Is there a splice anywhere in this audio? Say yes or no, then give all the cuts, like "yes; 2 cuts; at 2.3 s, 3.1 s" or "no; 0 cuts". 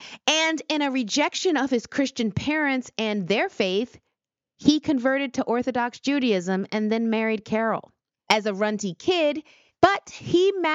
yes; 2 cuts; at 8.2 s, 9.7 s